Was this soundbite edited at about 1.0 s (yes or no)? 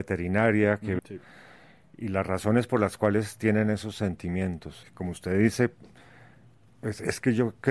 yes